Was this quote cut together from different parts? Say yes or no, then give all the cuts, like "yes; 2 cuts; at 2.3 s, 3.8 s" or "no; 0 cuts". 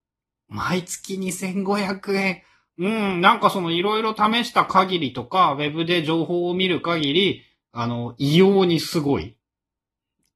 yes; 1 cut; at 2.7 s